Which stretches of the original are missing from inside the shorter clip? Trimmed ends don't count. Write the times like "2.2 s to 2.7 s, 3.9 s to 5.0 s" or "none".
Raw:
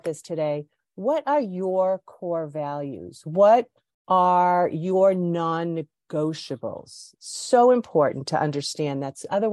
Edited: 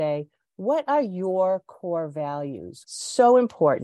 3.2 s to 7.2 s